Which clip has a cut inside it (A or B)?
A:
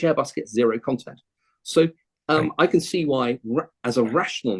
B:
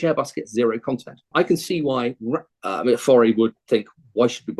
B